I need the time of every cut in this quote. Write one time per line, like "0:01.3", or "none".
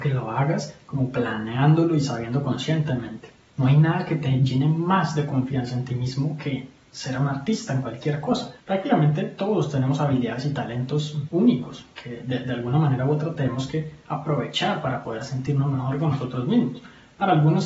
0:03.4
0:08.6